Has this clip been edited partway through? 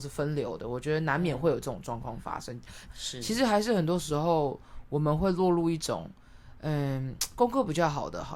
yes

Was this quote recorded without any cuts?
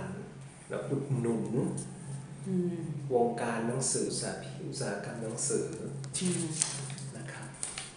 no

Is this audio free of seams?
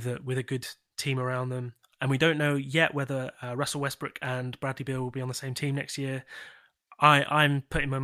yes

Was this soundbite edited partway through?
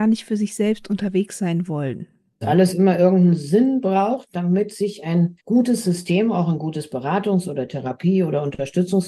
yes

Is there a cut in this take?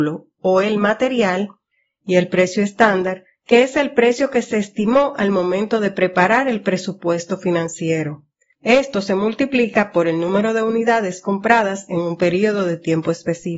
no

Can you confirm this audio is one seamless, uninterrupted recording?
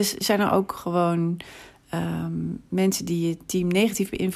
yes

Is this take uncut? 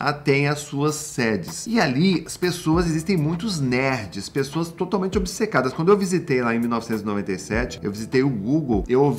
no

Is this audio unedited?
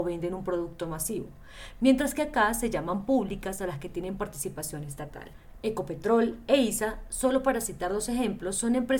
yes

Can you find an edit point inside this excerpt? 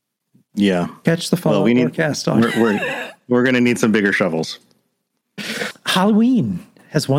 yes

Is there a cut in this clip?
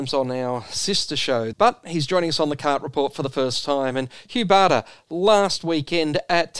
yes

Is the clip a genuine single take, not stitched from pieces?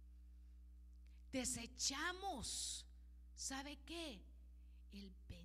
no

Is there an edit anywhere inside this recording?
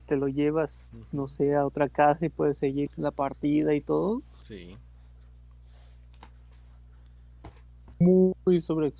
yes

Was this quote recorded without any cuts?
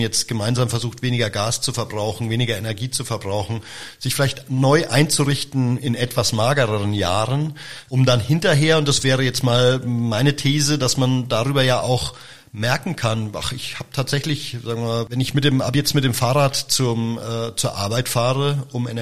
yes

